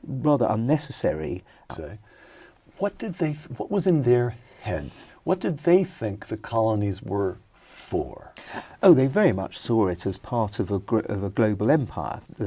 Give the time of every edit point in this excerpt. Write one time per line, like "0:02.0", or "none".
0:01.7